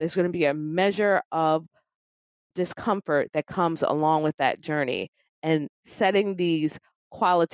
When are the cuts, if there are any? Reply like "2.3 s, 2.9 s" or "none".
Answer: 2.5 s